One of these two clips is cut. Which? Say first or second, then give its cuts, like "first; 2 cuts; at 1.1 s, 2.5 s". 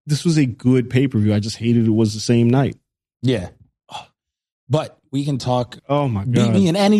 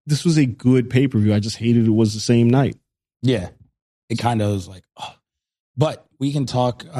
first; 2 cuts; at 3.8 s, 5.8 s